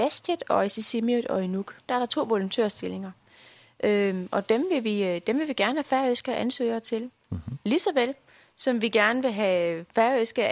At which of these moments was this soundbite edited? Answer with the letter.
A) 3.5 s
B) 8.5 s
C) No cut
C